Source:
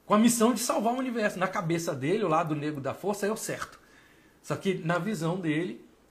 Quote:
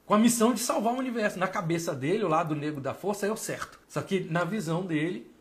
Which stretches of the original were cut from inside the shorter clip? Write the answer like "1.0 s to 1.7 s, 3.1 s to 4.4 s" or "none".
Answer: 3.8 s to 4.4 s